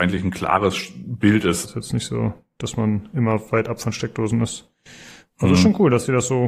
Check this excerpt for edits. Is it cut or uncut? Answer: cut